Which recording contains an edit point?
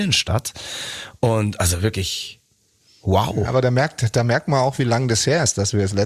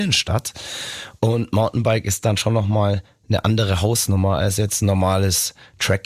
second; 1 cut; at 1.2 s

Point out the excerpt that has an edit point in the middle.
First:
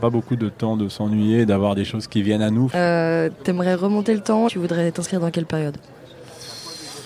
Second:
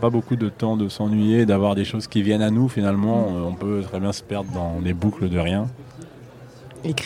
first; 2 cuts; at 2.7 s, 4.5 s

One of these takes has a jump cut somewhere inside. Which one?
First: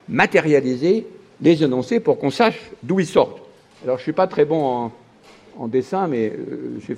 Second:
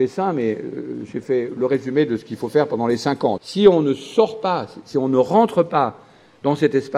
second; 1 cut; at 3.4 s

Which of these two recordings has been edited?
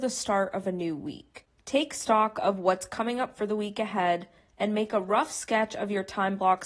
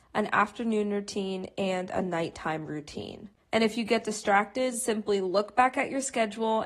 second; 1 cut; at 3.4 s

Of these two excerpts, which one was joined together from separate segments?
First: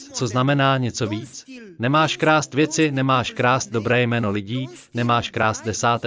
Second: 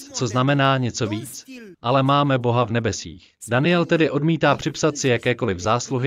second; 2 cuts; at 1.7 s, 3.4 s

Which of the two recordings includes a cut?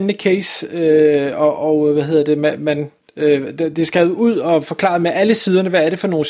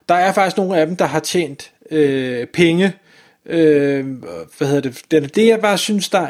second; 1 cut; at 5.3 s

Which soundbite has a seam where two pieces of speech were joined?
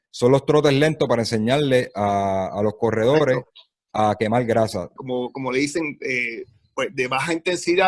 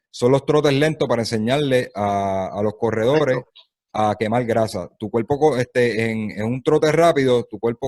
first; 1 cut; at 5.0 s

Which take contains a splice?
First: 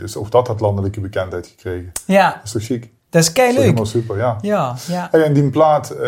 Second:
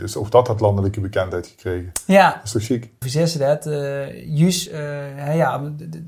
second; 2 cuts; at 3.0 s, 4.7 s

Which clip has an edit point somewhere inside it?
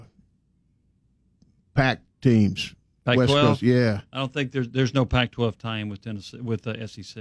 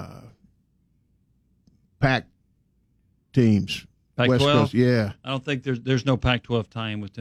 first; 1 cut; at 2.1 s

